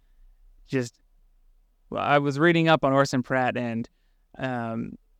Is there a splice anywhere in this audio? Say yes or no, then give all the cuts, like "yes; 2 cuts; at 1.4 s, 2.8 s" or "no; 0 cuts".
no; 0 cuts